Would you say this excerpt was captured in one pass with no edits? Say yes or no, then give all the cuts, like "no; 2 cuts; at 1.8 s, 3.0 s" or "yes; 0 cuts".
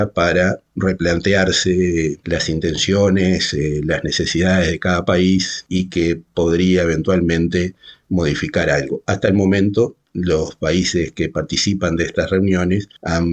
yes; 0 cuts